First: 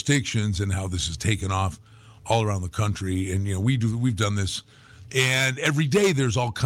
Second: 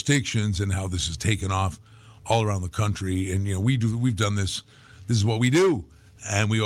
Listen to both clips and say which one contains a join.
first; 1 cut; at 5.0 s

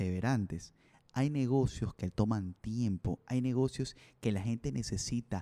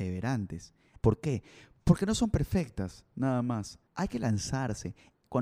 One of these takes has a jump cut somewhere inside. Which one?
second; 2 cuts; at 1.0 s, 3.9 s

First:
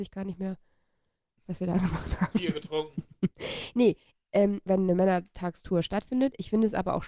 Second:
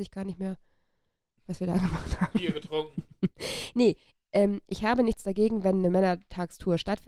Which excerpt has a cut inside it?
first; 1 cut; at 4.7 s

